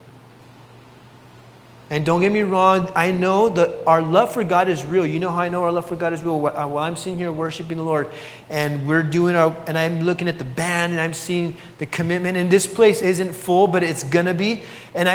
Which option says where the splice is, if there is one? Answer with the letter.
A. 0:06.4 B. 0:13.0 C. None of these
B